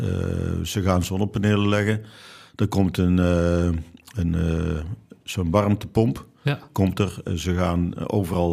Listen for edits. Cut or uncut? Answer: uncut